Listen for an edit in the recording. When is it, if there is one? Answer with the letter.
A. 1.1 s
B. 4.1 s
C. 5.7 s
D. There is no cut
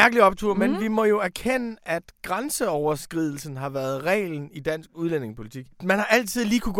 C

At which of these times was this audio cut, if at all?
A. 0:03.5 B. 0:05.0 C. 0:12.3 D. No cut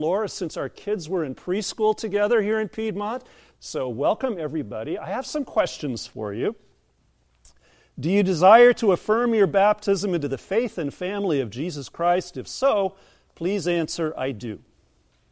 A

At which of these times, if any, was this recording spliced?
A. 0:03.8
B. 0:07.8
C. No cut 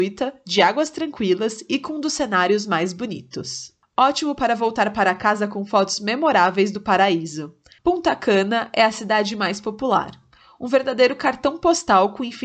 B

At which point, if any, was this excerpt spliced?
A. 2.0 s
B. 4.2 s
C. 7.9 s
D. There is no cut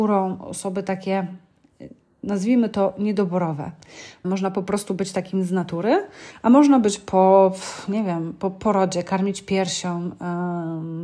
B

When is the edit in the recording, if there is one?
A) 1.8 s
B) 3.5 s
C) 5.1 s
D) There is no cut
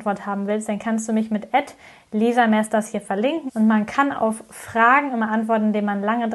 B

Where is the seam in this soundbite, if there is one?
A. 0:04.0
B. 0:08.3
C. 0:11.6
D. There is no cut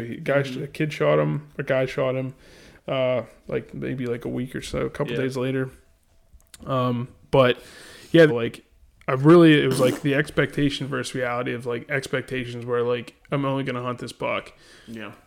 B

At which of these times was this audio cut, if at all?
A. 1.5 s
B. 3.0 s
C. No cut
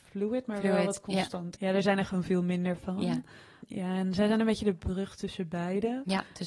A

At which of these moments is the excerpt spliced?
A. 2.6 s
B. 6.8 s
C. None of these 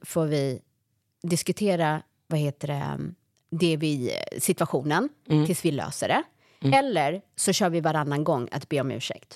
C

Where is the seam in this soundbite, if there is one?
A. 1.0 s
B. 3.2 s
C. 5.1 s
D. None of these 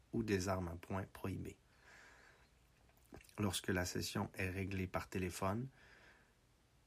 B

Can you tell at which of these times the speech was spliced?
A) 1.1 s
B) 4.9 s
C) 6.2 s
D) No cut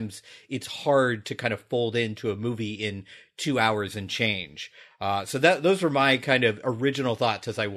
D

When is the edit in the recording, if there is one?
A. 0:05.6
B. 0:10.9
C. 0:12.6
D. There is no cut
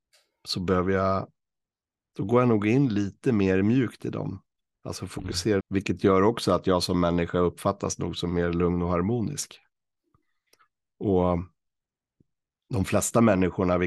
A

